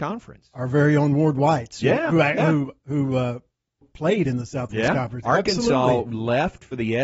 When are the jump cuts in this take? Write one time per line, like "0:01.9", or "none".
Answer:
0:03.8
0:05.2

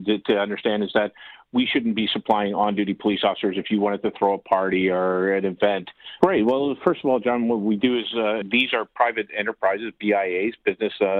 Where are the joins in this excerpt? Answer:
0:06.2
0:08.4

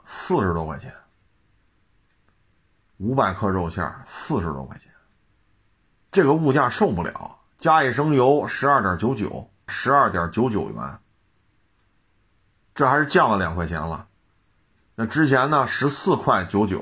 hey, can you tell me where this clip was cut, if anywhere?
0:09.7

